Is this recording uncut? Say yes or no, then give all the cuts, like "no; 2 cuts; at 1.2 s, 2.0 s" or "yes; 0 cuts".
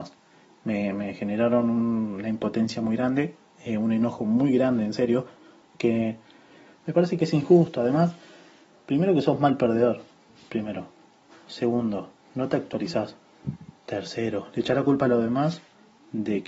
yes; 0 cuts